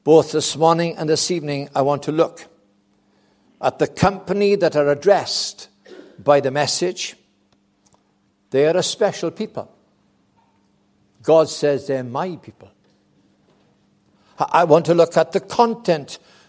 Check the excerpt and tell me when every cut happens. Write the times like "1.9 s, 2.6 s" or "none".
none